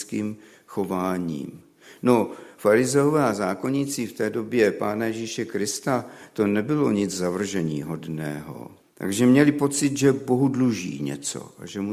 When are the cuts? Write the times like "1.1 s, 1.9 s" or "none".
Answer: 8.8 s